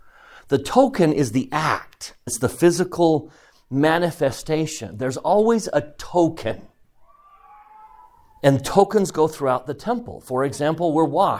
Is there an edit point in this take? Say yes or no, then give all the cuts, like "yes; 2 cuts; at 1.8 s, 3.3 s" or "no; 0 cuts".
yes; 1 cut; at 2.3 s